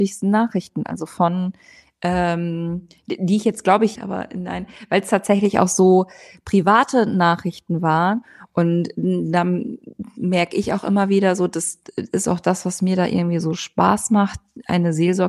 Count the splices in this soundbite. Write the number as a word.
one